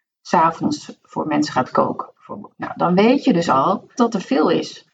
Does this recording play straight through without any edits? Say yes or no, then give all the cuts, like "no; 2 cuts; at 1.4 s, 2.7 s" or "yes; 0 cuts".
no; 1 cut; at 4.0 s